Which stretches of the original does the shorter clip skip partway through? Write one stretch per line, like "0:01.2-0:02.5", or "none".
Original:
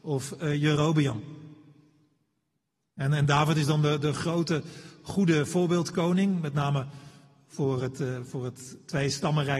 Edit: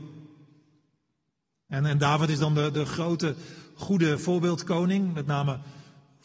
none